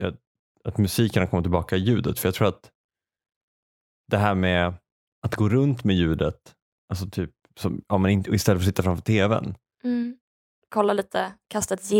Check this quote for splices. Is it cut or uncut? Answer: cut